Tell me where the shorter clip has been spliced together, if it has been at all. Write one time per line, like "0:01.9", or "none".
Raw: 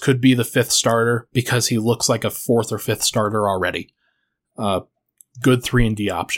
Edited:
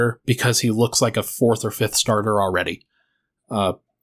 none